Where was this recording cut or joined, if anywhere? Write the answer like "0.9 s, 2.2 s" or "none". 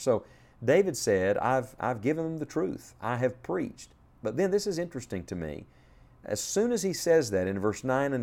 none

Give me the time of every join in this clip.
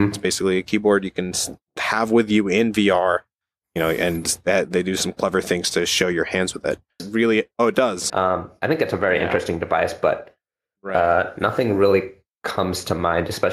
7.0 s, 8.1 s

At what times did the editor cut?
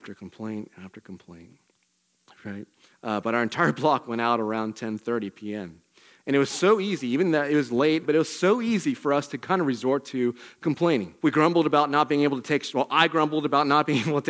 2.9 s, 8.0 s, 11.2 s

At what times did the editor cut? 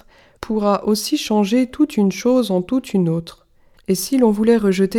3.7 s

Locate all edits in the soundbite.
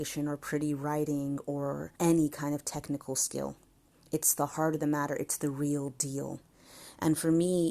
1.9 s

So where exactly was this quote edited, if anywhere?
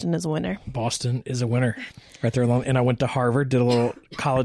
1.9 s

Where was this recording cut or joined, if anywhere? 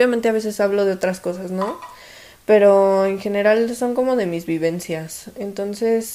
none

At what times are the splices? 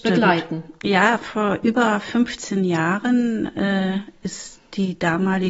none

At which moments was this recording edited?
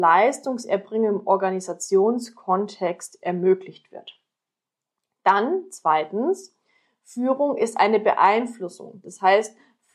none

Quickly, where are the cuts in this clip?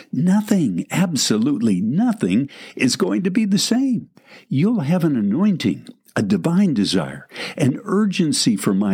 none

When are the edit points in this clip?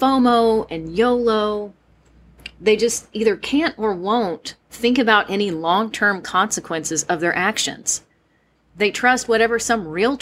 8.5 s

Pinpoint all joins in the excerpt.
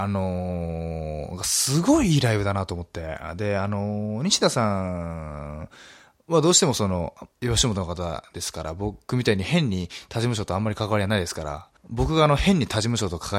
7.3 s, 11.8 s

